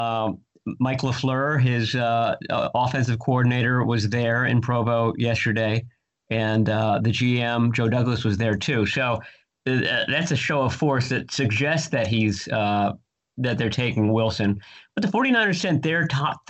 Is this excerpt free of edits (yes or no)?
yes